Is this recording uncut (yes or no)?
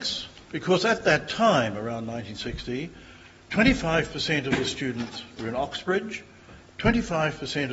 yes